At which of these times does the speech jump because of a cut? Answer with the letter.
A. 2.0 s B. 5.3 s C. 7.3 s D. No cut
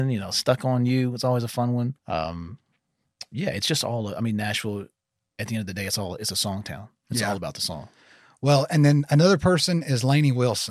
A